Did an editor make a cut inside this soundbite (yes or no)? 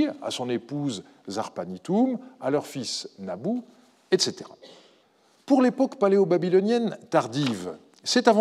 no